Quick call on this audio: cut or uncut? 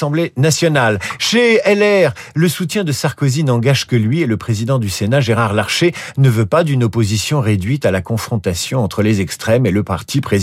uncut